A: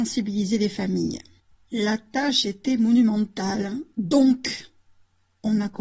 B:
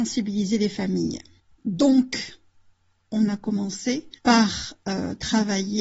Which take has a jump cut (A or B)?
B